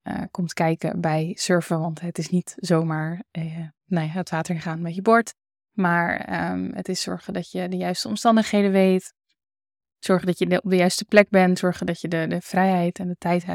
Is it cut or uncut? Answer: uncut